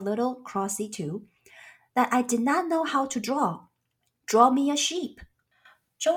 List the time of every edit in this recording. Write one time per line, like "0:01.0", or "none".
0:04.2